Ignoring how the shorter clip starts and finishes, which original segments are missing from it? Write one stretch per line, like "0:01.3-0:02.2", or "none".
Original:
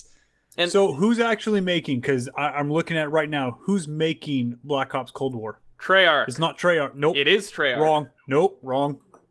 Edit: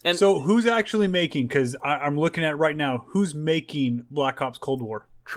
none